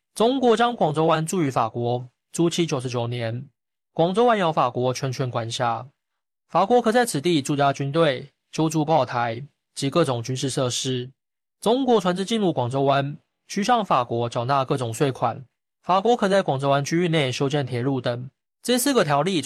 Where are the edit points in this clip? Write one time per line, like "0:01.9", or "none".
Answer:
none